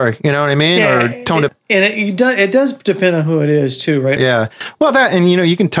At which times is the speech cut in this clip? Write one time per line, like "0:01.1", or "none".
0:01.5
0:04.2

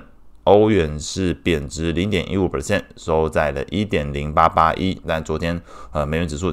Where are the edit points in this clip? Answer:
0:05.0

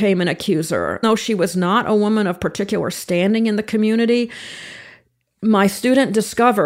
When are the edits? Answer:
0:01.0

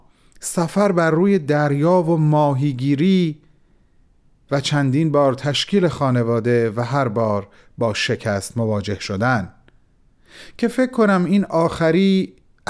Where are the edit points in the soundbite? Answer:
none

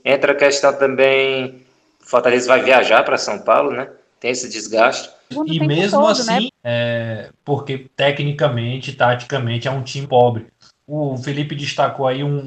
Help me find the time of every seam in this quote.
0:05.3
0:06.5
0:10.0

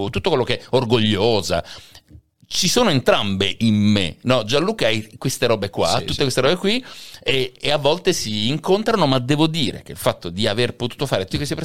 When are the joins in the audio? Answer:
none

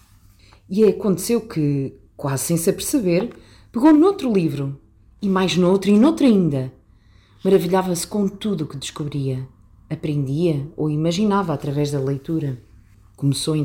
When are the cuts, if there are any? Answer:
none

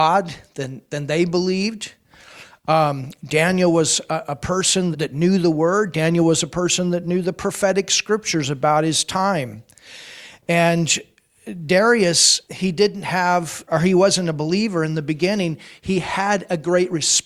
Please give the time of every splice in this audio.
0:04.9
0:12.5
0:13.7

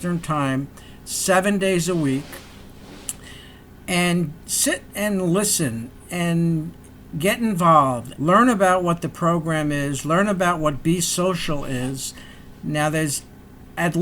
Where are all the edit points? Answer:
0:08.1
0:12.5

